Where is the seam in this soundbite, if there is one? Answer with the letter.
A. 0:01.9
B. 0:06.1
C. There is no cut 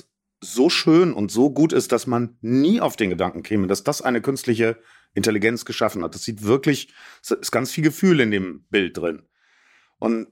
C